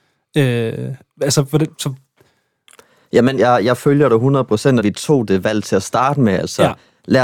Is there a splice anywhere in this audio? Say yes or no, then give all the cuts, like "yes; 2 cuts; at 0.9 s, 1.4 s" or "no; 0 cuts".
yes; 2 cuts; at 3.4 s, 4.8 s